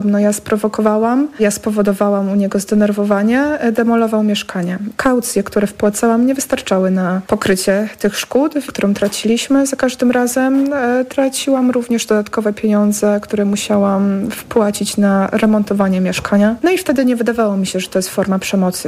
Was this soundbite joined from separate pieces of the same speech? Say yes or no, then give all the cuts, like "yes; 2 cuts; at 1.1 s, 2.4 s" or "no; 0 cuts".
yes; 1 cut; at 8.7 s